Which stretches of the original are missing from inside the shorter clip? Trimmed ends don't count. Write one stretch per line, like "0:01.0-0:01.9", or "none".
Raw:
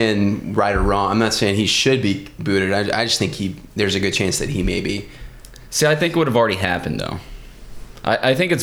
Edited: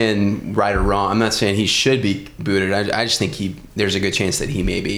none